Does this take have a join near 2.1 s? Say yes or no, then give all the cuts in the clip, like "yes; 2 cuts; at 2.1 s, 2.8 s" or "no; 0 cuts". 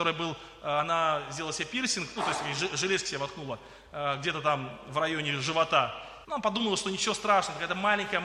no; 1 cut; at 6.2 s